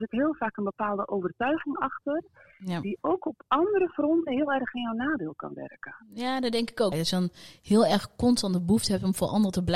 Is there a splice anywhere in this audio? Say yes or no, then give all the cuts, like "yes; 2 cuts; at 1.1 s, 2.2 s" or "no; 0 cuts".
yes; 1 cut; at 6.9 s